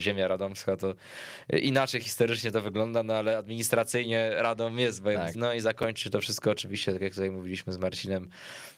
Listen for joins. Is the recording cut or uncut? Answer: cut